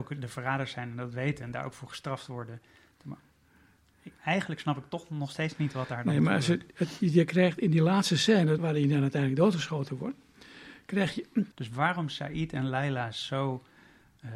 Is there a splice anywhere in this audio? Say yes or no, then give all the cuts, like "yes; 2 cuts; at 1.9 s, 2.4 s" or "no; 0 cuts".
yes; 2 cuts; at 8.6 s, 11.5 s